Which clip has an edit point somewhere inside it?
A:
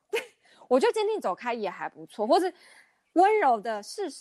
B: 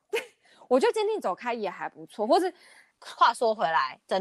B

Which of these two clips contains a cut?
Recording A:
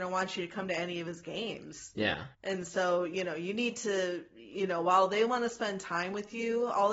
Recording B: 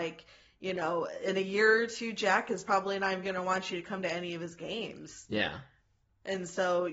A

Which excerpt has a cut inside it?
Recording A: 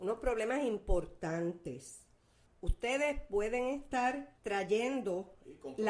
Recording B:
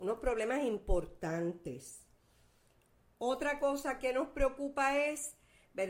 A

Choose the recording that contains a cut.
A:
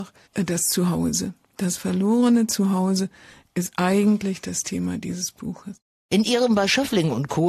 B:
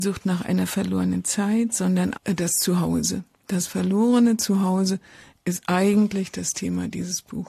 B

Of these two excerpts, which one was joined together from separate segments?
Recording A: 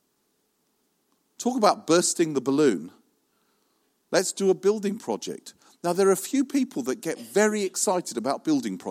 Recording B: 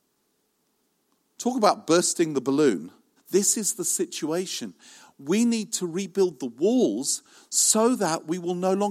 B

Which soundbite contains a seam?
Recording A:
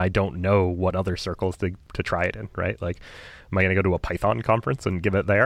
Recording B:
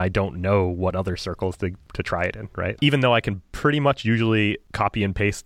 B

